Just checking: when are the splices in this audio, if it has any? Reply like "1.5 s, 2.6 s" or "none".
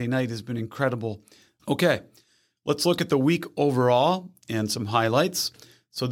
1.6 s